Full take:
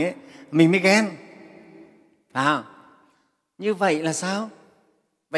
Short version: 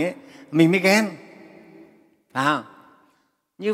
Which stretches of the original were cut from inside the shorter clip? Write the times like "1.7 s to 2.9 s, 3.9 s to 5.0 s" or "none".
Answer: none